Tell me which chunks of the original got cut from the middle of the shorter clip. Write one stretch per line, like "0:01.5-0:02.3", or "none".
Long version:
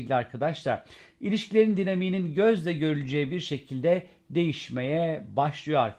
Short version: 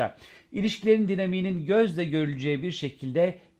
none